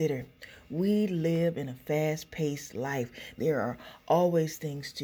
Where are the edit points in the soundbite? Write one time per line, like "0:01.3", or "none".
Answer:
0:03.4